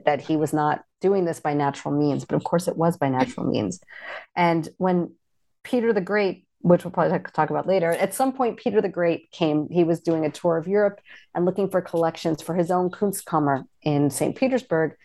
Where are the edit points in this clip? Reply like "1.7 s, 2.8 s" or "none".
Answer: none